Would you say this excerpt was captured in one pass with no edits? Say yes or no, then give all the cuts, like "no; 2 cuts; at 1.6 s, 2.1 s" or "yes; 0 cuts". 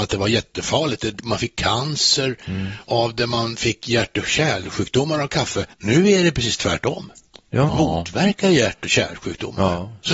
no; 2 cuts; at 5.7 s, 7.7 s